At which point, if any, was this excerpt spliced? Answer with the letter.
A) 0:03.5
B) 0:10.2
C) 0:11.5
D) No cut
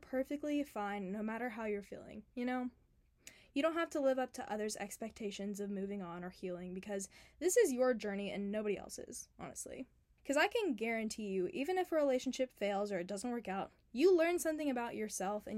B